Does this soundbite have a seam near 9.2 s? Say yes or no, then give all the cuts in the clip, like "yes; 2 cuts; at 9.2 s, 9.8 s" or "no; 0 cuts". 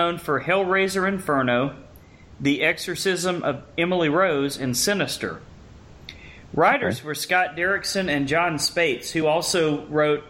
no; 0 cuts